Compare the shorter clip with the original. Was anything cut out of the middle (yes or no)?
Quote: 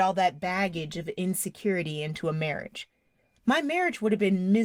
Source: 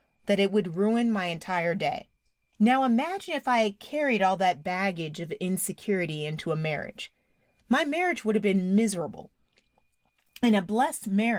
no